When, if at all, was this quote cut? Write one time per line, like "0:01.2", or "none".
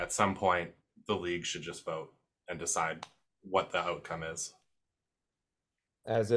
none